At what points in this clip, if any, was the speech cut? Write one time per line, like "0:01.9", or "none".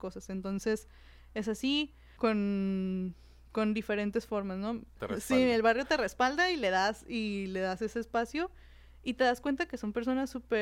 0:02.2
0:05.0